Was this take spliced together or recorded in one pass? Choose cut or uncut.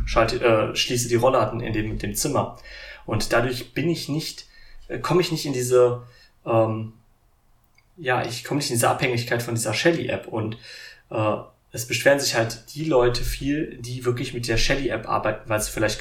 uncut